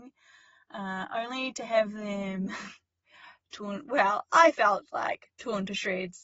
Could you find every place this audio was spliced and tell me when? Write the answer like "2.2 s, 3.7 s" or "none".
none